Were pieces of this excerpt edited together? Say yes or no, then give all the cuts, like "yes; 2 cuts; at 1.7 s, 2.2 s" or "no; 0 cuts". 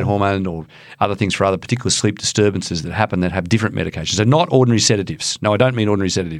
no; 0 cuts